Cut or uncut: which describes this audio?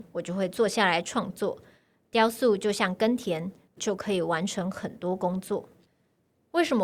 cut